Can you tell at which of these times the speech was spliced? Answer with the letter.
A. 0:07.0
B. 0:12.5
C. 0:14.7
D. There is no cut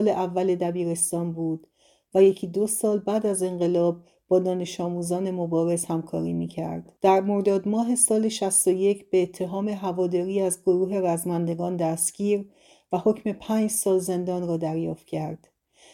A